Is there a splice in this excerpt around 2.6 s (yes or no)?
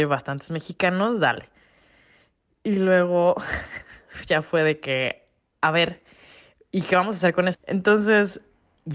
no